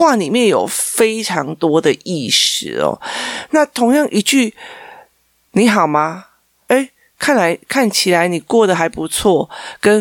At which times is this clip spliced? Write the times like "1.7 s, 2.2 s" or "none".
6.7 s